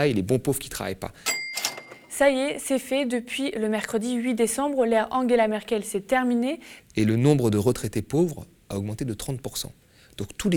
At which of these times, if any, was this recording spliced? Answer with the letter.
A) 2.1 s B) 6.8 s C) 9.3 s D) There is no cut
B